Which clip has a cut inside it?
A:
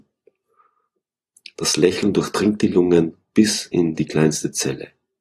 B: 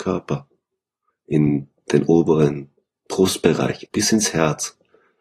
B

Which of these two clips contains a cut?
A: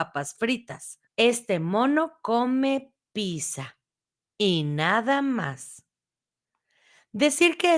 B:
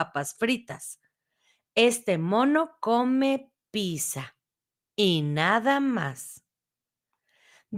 A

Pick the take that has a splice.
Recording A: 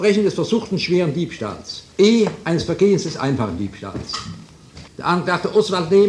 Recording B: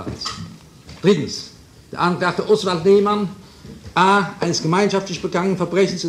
A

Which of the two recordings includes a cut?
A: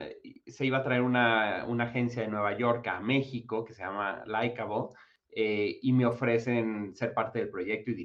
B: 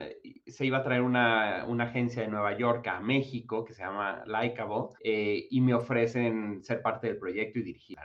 B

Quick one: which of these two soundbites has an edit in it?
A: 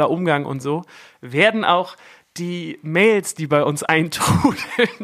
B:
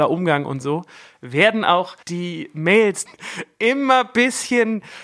B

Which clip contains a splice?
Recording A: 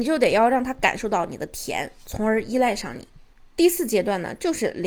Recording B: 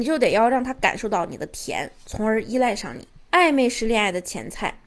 B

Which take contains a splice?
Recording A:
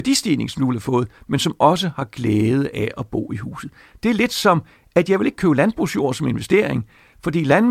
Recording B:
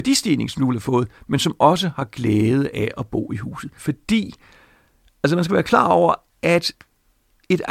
B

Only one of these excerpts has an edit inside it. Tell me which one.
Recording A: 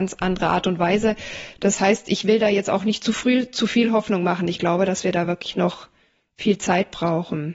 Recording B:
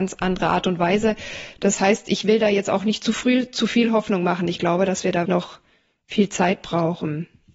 B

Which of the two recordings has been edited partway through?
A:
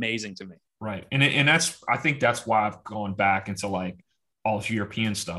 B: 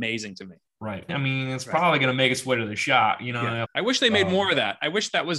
B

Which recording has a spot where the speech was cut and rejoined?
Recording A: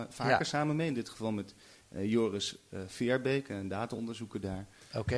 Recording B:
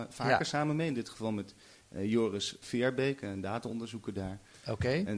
B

